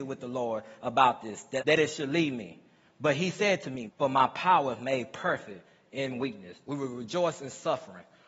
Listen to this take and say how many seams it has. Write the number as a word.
three